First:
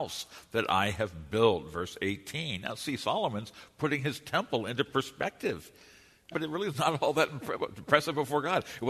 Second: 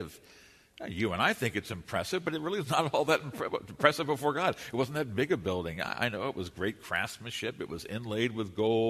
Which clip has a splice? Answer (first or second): first